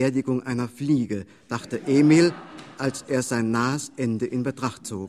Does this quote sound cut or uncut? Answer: uncut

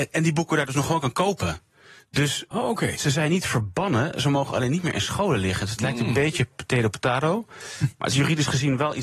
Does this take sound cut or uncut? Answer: uncut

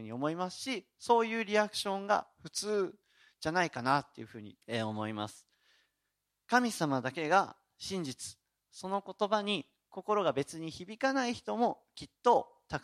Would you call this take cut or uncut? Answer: cut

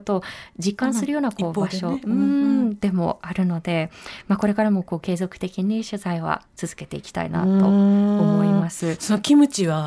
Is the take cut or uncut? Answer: uncut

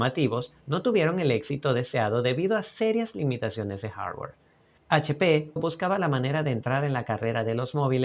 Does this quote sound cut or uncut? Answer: cut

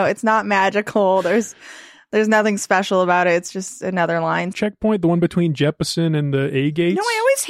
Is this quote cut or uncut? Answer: cut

